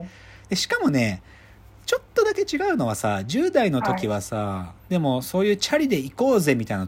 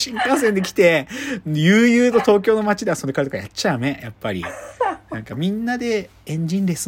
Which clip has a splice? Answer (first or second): first